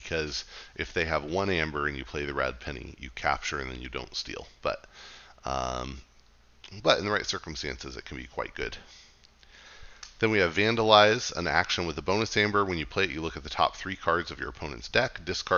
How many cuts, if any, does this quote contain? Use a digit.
0